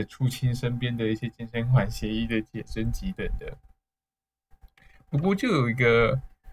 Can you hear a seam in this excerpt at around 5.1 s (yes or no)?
no